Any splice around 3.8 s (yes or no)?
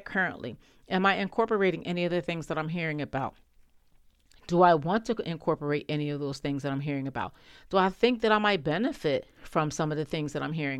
no